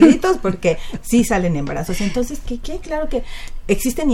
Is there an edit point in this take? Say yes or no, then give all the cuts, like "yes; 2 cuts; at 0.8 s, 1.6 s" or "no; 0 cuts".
no; 0 cuts